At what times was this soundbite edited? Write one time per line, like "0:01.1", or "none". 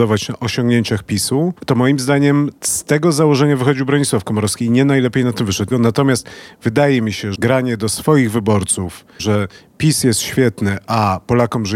0:05.7
0:07.3
0:09.2